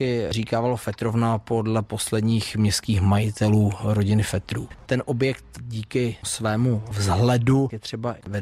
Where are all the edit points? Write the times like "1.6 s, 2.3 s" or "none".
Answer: 4.9 s